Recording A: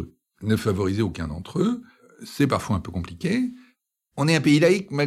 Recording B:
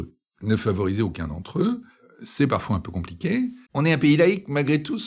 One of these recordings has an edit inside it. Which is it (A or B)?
B